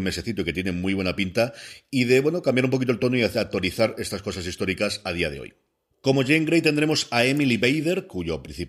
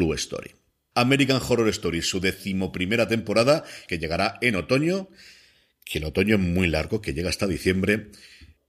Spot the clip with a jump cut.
second; 2 cuts; at 0.9 s, 3.9 s

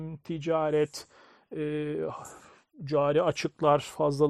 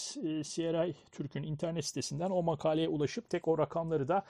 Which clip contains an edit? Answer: second; 1 cut; at 3.3 s

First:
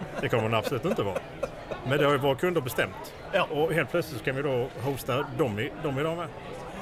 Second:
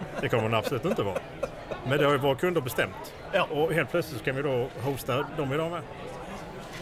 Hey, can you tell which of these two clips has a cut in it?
second; 1 cut; at 5.3 s

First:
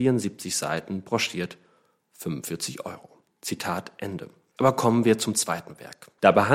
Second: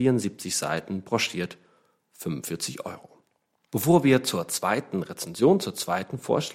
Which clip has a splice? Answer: first; 2 cuts; at 3.3 s, 4.6 s

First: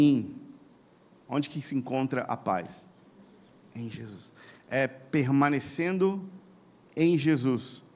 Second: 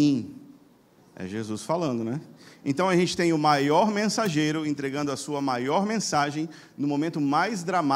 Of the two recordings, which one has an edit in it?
second; 1 cut; at 1.0 s

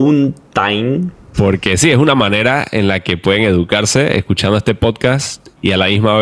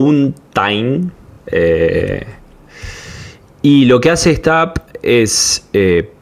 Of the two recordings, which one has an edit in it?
first; 1 cut; at 1.3 s

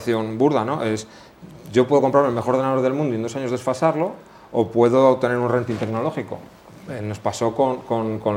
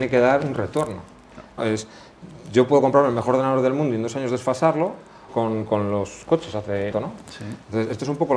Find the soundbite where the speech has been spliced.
second; 3 cuts; at 1.6 s, 5.3 s, 6.9 s

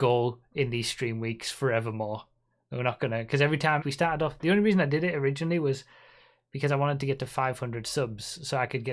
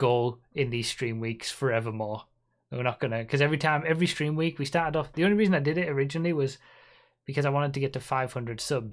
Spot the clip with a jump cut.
first; 1 cut; at 3.8 s

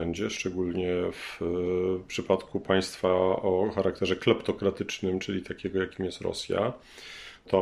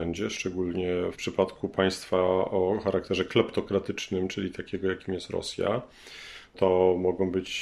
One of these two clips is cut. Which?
second; 1 cut; at 1.1 s

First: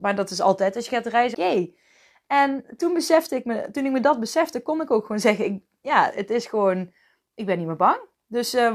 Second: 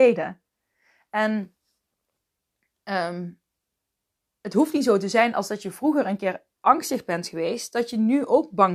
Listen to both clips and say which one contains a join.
first; 1 cut; at 1.3 s

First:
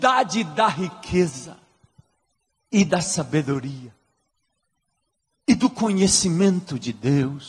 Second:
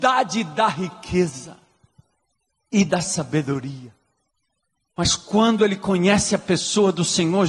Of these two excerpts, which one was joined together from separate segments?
second; 1 cut; at 4.8 s

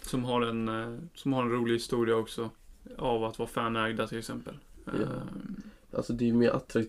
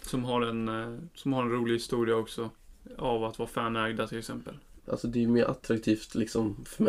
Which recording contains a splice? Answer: second; 1 cut; at 4.8 s

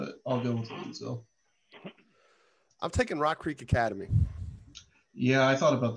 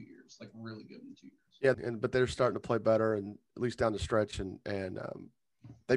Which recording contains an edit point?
second; 1 cut; at 1.7 s

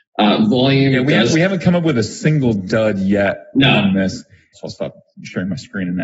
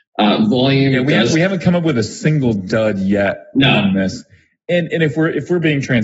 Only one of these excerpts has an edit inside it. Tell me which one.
first; 1 cut; at 4.5 s

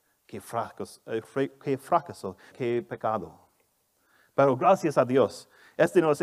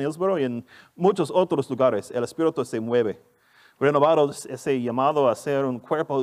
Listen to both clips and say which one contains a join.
first; 1 cut; at 2.5 s

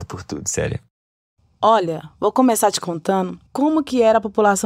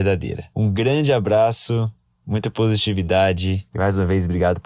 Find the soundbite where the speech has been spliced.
first; 1 cut; at 3.5 s

